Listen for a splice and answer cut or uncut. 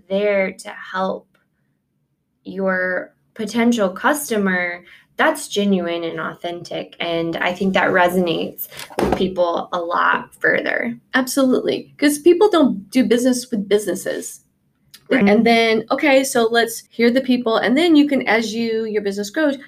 cut